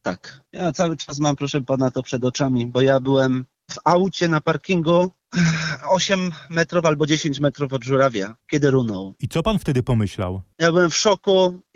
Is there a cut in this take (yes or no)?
yes